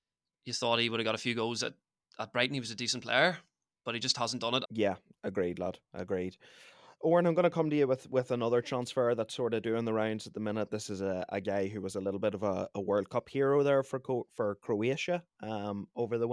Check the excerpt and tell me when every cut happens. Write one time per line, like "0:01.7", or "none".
0:04.7